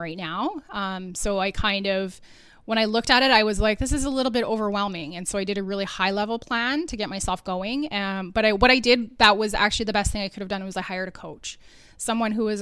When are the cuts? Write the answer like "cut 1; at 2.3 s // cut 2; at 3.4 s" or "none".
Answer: none